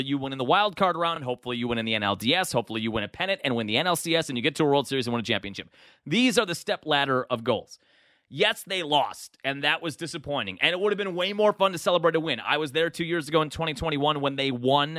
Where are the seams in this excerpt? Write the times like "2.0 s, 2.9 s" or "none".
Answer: none